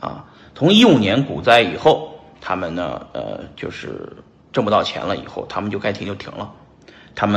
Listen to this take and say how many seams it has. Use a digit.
0